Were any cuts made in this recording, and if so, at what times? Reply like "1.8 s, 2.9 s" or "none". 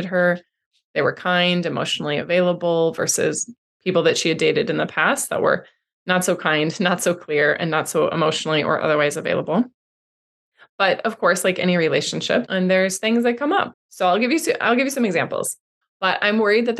12.5 s, 13.7 s, 15.8 s